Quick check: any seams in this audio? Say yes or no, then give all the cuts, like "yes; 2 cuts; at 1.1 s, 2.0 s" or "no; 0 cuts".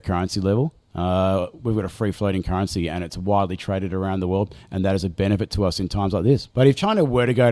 yes; 1 cut; at 6.5 s